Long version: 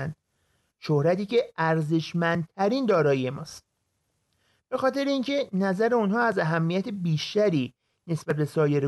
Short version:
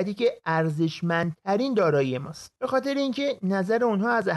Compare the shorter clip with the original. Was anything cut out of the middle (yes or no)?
yes